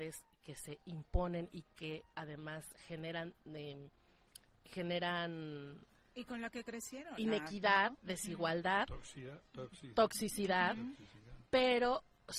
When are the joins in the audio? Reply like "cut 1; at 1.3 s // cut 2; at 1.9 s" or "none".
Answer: none